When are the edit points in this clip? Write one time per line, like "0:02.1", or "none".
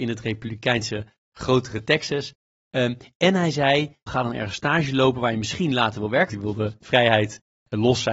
0:04.1
0:06.3